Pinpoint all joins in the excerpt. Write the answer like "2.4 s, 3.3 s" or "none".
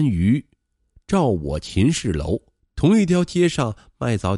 2.6 s